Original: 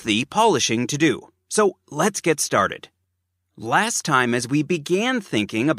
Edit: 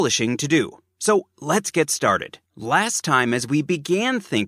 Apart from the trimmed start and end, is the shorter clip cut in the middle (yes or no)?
yes